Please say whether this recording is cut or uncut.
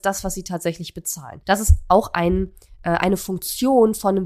cut